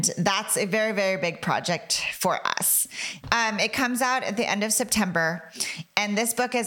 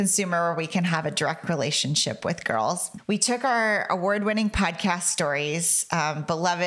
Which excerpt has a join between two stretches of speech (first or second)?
first